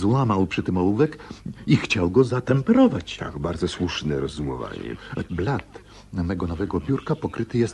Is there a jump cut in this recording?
yes; 1 cut; at 5.3 s

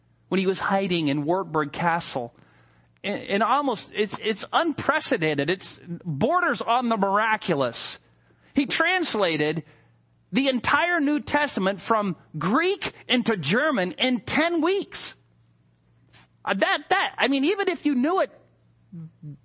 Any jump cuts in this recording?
yes; 1 cut; at 16.2 s

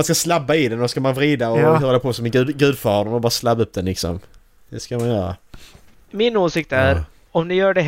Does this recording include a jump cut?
no; 0 cuts

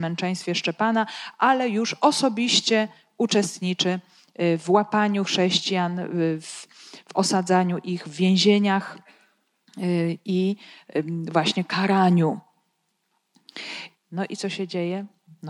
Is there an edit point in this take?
yes; 1 cut; at 13.9 s

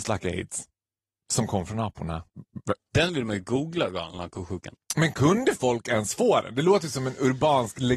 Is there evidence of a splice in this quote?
yes; 2 cuts; at 2.8 s, 4.7 s

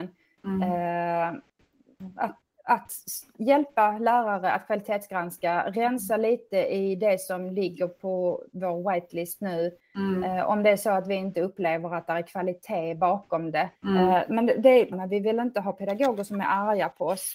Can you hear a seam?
yes; 2 cuts; at 13.8 s, 14.9 s

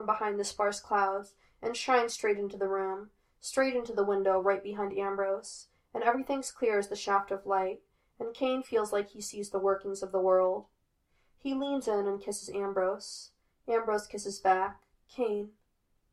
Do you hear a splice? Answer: yes; 1 cut; at 15.0 s

